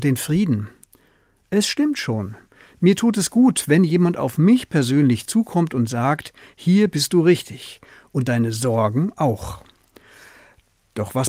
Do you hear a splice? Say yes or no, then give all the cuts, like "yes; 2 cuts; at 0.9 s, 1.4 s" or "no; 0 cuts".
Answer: no; 0 cuts